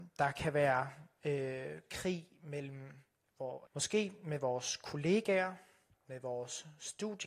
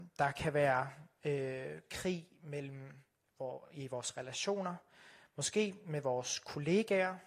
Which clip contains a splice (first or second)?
first